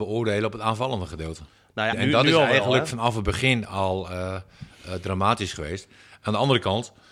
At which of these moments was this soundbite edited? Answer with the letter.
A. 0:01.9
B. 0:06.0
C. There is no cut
A